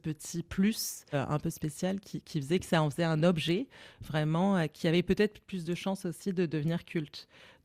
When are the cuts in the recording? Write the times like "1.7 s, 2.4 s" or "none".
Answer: 1.1 s